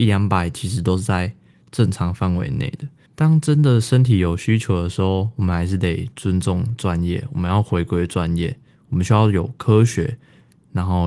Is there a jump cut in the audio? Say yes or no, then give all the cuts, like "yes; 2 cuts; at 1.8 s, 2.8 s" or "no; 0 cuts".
yes; 1 cut; at 3.1 s